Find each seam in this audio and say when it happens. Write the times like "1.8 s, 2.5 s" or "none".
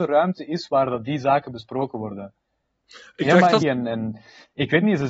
3.6 s